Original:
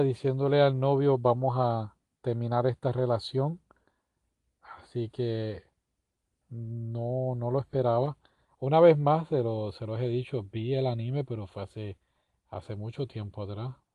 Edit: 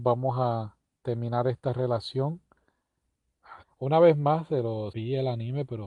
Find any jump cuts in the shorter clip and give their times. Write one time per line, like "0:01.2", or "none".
0:03.6
0:04.9

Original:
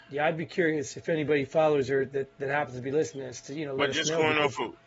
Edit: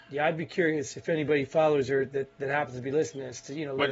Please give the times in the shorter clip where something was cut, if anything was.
none

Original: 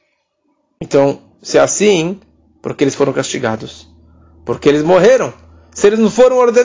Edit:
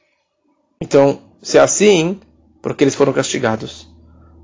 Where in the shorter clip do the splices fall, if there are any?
none

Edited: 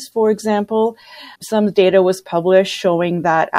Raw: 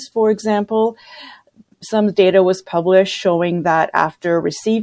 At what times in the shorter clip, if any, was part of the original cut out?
0:01.4

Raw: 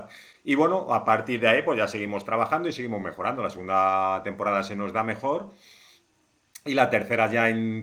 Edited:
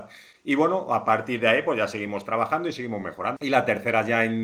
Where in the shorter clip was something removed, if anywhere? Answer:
0:03.4

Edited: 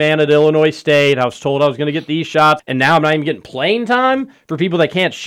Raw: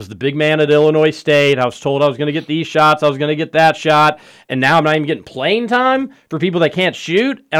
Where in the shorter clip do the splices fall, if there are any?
0:02.6

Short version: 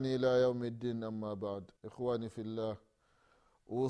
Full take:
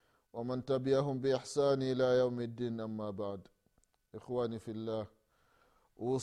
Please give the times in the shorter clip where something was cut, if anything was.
0:01.8

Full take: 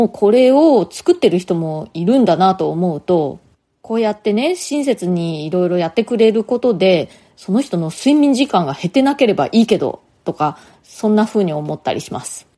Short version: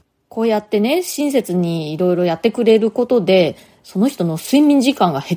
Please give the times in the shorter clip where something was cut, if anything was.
none

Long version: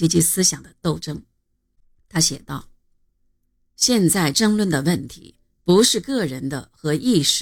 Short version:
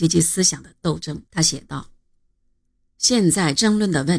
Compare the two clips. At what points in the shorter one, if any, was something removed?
0:01.3

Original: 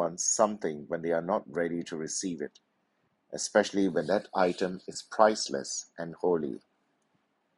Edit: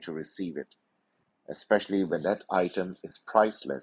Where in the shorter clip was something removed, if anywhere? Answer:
none

